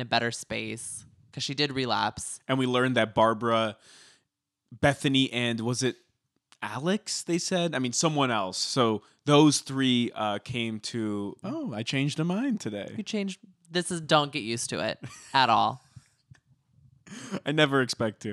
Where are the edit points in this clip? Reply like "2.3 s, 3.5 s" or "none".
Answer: 11.4 s